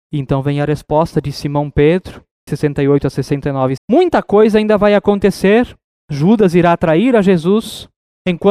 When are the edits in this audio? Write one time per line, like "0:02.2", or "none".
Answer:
0:02.5
0:03.8